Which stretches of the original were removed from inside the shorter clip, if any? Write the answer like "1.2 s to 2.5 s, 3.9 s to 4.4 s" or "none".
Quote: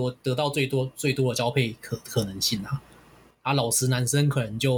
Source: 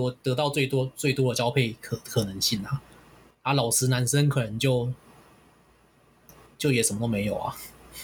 none